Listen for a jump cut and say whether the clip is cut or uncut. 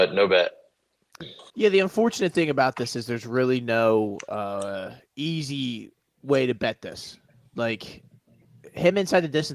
cut